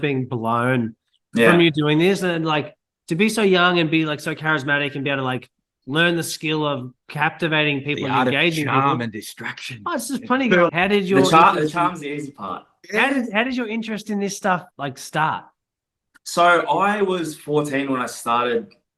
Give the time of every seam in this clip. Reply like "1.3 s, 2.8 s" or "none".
10.7 s, 12.8 s, 14.7 s